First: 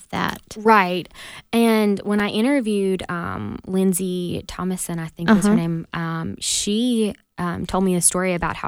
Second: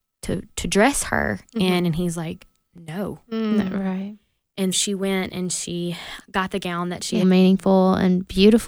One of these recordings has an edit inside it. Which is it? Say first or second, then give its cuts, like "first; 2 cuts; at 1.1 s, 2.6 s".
second; 3 cuts; at 4.7 s, 6.2 s, 7.2 s